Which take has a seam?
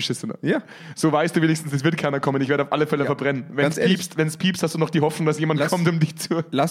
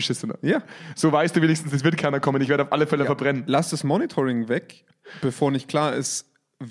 second; 1 cut; at 3.5 s

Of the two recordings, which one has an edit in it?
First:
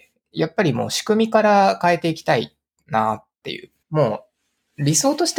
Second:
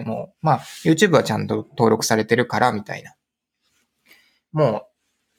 first; 1 cut; at 3.8 s

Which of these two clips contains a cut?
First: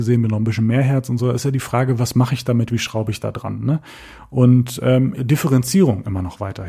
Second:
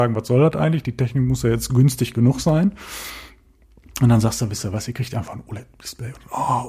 first; 1 cut; at 5.2 s

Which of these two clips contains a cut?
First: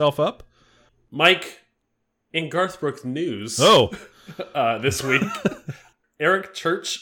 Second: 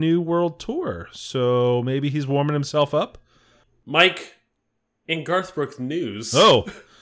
first; 1 cut; at 6.0 s

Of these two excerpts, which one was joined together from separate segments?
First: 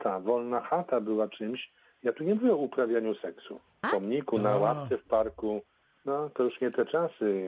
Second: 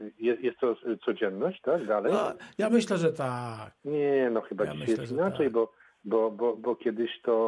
first; 1 cut; at 3.8 s

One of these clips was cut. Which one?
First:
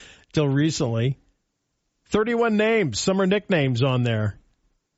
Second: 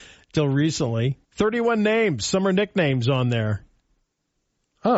second; 1 cut; at 1.2 s

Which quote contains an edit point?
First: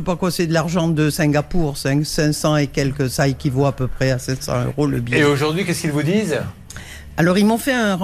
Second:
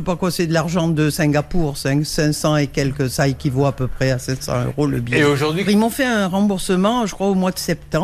second; 1 cut; at 5.7 s

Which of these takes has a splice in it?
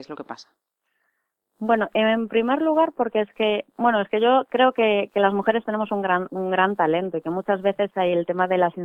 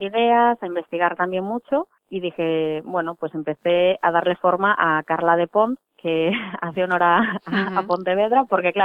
second; 1 cut; at 2.0 s

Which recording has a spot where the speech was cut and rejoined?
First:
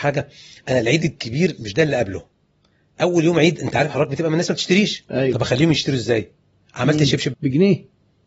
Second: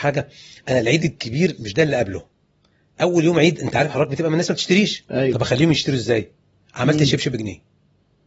first; 1 cut; at 7.3 s

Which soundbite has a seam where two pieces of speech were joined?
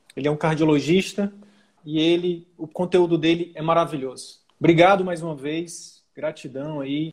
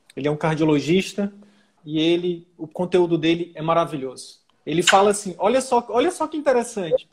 first; 1 cut; at 4.5 s

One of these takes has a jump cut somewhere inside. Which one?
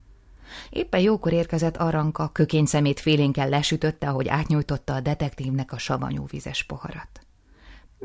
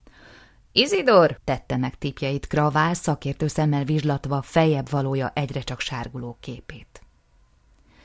second; 1 cut; at 1.4 s

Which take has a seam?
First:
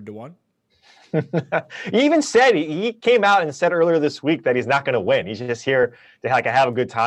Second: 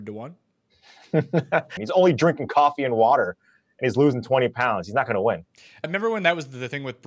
second; 2 cuts; at 1.8 s, 5.8 s

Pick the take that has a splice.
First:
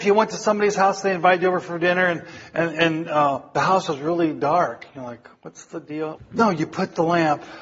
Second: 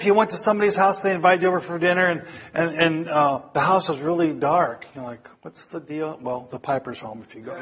first; 1 cut; at 6.2 s

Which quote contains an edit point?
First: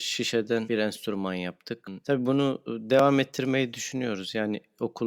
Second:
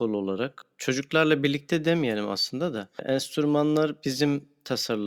first; 1 cut; at 2.0 s

